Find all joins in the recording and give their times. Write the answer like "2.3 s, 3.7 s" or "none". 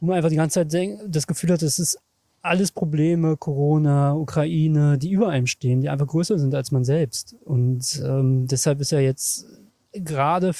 none